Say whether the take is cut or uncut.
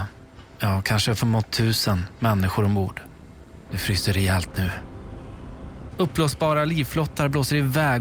cut